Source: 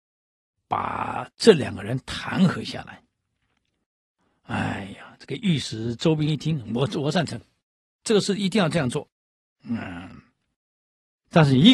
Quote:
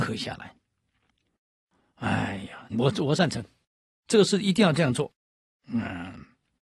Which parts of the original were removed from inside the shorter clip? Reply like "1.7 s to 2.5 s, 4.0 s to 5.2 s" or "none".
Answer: 5.2 s to 6.7 s